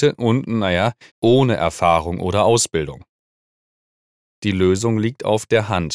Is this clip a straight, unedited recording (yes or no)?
no